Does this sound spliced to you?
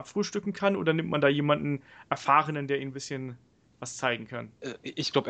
no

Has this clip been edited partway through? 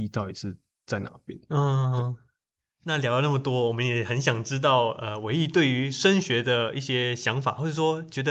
no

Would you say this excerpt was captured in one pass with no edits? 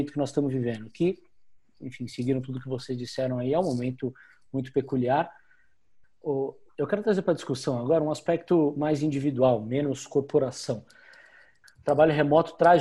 no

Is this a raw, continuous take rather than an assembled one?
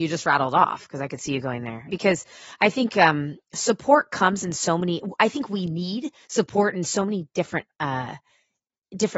no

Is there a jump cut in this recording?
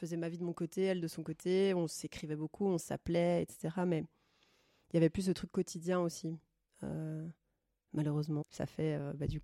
yes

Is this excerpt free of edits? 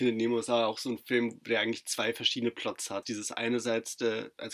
no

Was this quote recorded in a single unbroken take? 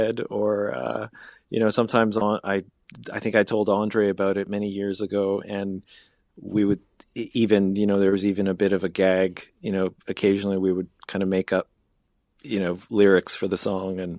yes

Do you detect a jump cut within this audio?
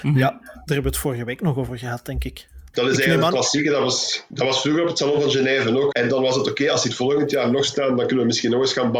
yes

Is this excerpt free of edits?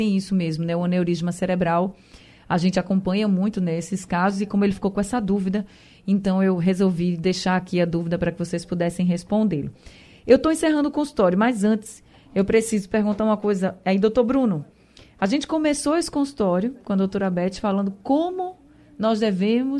yes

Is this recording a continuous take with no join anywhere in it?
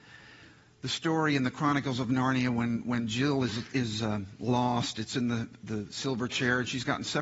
yes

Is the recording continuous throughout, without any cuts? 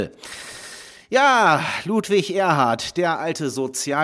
yes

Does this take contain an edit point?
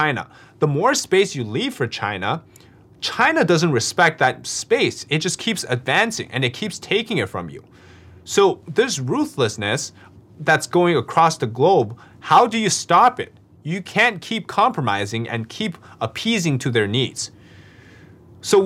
no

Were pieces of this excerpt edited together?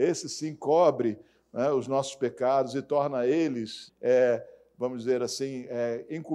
yes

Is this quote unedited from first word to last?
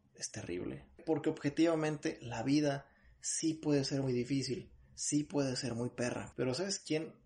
no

